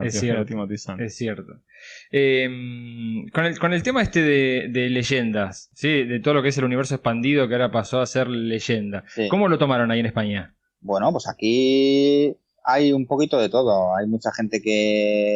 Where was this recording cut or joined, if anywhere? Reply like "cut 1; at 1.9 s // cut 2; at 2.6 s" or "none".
none